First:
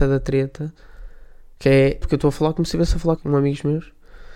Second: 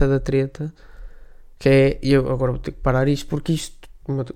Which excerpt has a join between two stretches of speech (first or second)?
first